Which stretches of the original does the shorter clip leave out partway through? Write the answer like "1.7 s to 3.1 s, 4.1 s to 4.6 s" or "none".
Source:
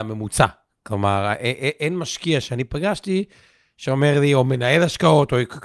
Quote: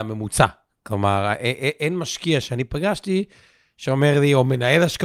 none